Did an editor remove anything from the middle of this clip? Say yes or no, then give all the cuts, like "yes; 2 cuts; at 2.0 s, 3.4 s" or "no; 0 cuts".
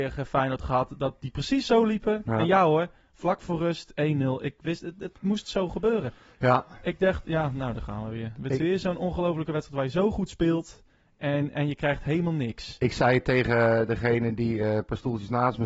no; 0 cuts